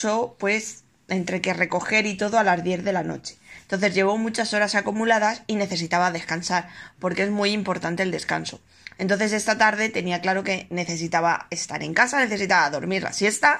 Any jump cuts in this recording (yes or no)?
no